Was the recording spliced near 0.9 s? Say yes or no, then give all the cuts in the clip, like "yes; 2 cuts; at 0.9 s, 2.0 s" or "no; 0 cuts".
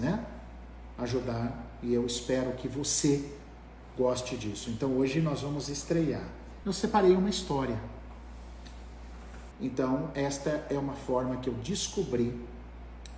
no; 2 cuts; at 6.6 s, 9.5 s